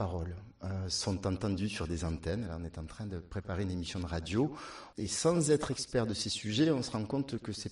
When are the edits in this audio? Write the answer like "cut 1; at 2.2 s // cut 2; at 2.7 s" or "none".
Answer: cut 1; at 4.9 s

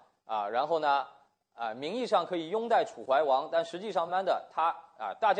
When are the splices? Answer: cut 1; at 4.1 s

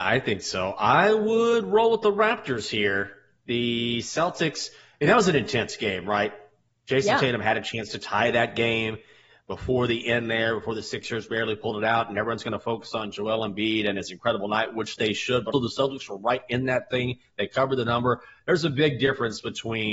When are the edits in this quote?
cut 1; at 15.5 s

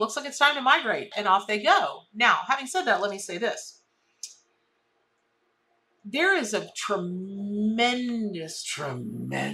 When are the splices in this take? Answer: cut 1; at 1.1 s

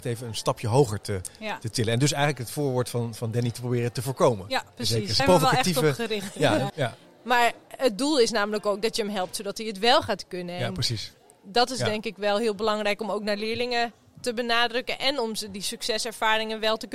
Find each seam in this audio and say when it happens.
cut 1; at 5.2 s // cut 2; at 6.7 s

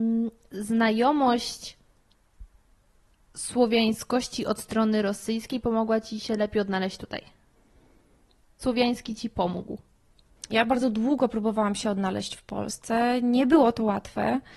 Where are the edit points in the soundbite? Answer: cut 1; at 8.6 s // cut 2; at 10.5 s

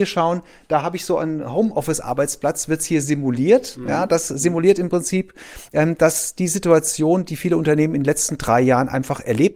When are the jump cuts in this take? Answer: none

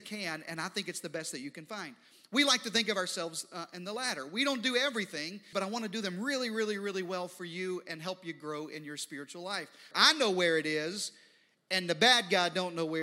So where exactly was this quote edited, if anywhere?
cut 1; at 5.5 s // cut 2; at 9.9 s

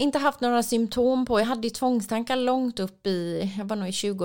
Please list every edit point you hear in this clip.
none

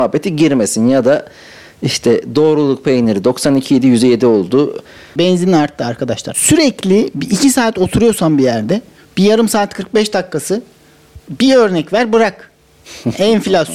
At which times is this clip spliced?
cut 1; at 5.2 s // cut 2; at 6.3 s // cut 3; at 11.2 s

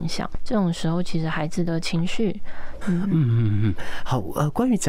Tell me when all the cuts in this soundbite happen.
cut 1; at 2.8 s

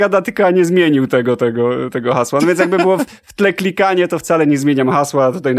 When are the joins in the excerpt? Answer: none

